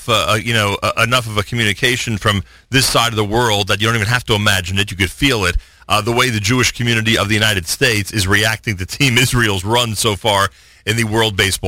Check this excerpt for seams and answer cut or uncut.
uncut